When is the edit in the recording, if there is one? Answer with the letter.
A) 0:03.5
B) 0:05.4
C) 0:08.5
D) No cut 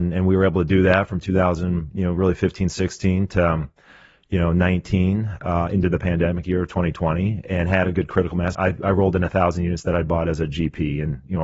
C